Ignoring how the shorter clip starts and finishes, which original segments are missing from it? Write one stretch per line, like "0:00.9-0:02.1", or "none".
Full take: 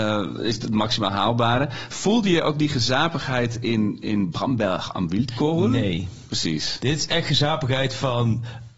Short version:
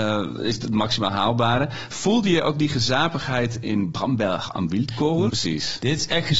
0:03.6-0:04.0
0:05.7-0:06.3